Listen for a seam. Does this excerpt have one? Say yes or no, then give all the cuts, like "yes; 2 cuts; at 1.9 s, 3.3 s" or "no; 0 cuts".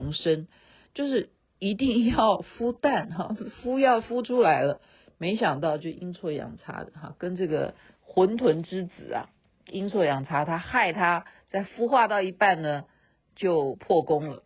yes; 1 cut; at 11.7 s